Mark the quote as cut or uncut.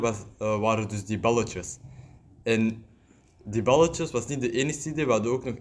uncut